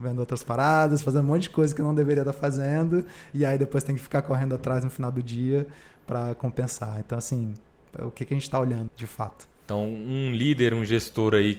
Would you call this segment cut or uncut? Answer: cut